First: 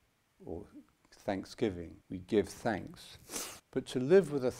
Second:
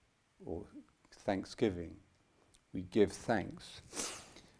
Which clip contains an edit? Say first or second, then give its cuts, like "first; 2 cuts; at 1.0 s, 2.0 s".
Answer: first; 2 cuts; at 2.0 s, 3.6 s